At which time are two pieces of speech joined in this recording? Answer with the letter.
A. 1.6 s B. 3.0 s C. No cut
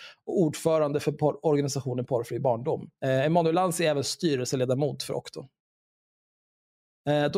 B